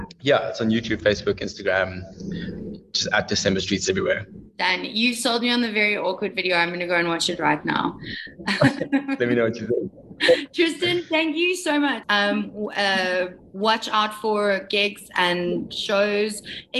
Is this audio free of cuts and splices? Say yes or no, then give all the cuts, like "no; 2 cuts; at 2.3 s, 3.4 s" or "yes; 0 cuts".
no; 1 cut; at 12.0 s